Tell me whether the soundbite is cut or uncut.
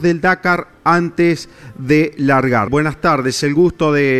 cut